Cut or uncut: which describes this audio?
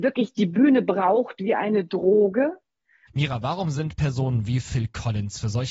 cut